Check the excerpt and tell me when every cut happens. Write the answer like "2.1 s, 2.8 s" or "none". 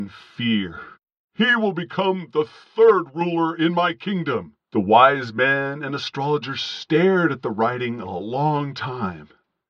1.2 s, 4.6 s

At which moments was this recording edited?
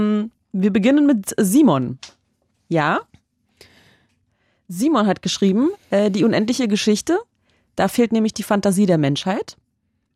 none

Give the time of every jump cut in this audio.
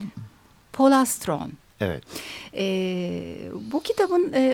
none

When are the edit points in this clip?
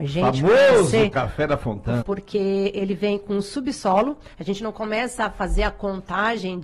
2.0 s

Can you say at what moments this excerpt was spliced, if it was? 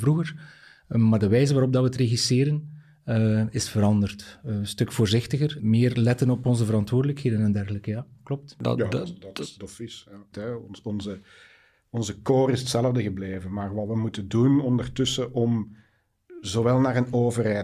5.6 s, 10.3 s

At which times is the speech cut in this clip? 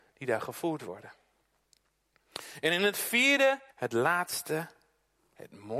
3.7 s

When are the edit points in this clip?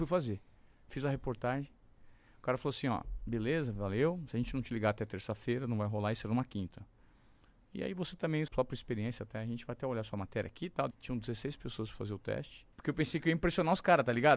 8.5 s, 10.9 s, 12.7 s

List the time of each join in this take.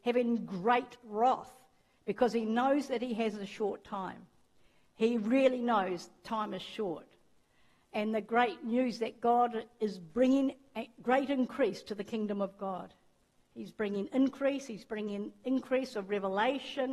none

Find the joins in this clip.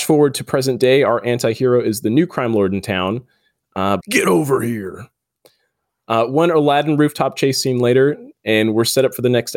4.0 s

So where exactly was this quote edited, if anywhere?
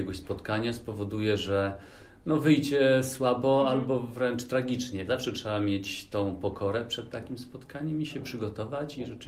5.1 s

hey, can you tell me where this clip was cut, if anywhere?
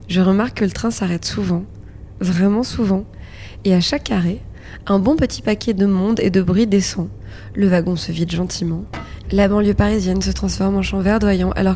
9.2 s

